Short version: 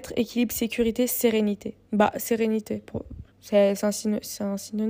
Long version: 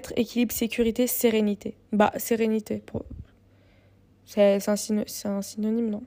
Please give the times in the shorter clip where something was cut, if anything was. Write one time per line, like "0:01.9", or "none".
0:03.3

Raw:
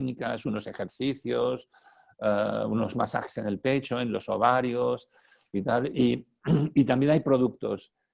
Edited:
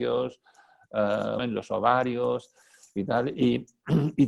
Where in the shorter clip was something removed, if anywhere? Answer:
0:01.4

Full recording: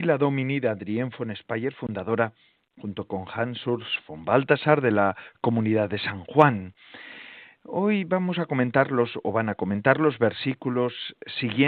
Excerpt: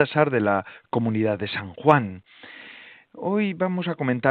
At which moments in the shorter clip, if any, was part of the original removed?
none

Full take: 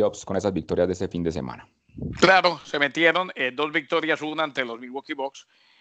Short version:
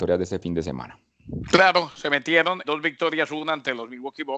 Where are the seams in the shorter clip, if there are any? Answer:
0:02.6

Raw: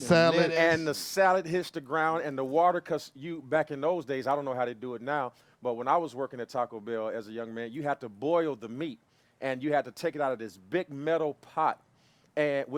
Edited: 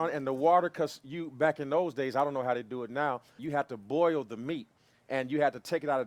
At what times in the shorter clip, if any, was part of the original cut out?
0:03.4

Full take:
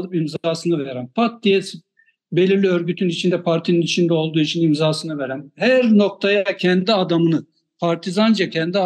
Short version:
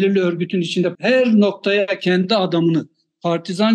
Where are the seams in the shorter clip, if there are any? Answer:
0:01.0

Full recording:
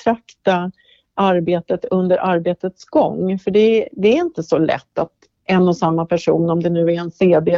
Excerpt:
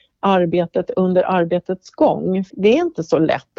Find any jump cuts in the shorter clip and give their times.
0:02.5

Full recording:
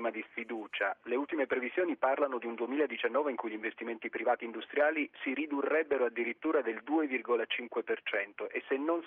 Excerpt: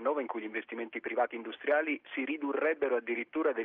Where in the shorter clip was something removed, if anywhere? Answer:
none

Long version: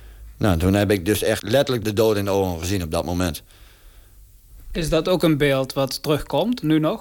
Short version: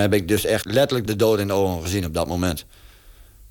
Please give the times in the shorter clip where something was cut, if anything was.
none

